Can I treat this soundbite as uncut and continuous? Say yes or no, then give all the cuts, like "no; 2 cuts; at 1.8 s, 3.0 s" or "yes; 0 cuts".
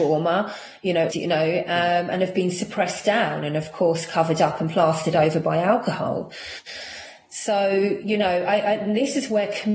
no; 1 cut; at 1.1 s